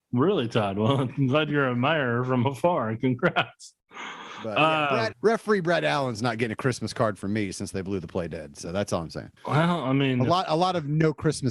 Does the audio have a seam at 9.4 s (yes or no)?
yes